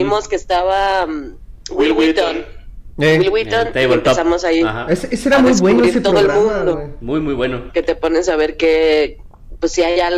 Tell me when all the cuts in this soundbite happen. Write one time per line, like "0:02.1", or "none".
0:07.7